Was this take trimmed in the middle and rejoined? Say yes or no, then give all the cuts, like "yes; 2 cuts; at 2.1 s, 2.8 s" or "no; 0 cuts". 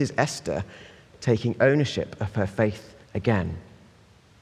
yes; 1 cut; at 3.0 s